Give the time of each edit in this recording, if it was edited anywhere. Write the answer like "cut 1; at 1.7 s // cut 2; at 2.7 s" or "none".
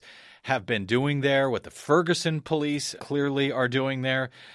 cut 1; at 3.0 s